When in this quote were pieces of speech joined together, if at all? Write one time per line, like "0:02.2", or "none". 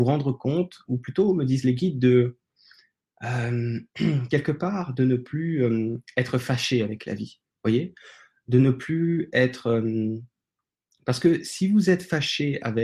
none